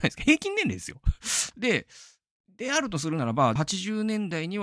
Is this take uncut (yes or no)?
no